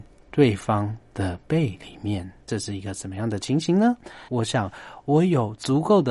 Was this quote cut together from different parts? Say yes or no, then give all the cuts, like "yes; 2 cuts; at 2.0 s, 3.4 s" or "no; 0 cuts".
yes; 2 cuts; at 2.4 s, 4.3 s